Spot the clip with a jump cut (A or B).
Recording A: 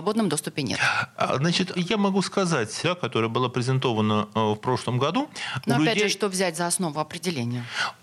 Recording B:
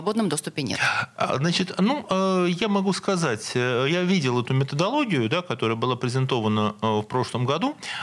A